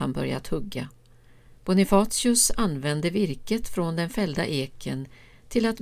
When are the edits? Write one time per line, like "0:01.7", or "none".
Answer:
0:01.5